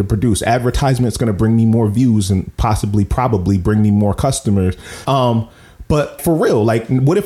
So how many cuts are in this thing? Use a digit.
2